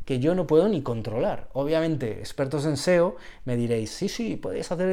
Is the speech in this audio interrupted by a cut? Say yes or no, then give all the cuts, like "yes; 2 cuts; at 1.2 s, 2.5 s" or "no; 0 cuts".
no; 0 cuts